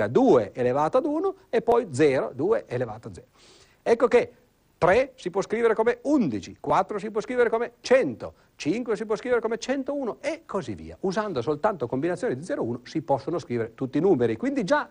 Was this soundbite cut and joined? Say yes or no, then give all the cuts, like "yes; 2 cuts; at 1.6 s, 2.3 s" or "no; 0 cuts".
no; 0 cuts